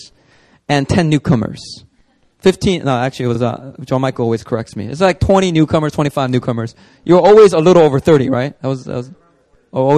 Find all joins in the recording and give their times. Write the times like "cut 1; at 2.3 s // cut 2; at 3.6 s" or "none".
none